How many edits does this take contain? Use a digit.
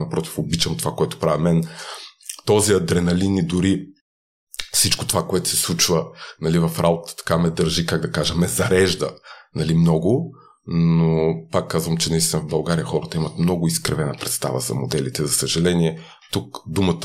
0